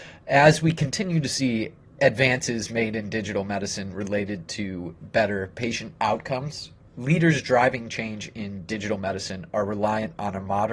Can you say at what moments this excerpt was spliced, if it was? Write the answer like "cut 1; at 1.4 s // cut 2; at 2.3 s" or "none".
none